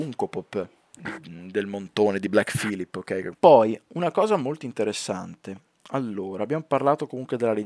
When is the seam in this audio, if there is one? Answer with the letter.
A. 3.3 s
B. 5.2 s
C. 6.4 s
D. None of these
A